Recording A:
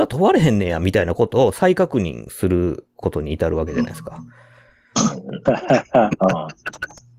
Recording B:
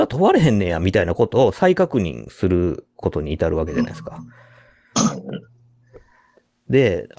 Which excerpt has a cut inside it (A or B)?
A